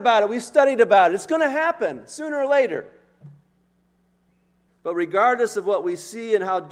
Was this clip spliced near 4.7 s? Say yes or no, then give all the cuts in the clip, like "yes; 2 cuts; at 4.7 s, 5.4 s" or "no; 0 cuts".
yes; 1 cut; at 4.7 s